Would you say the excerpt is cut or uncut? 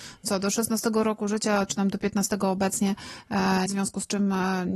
cut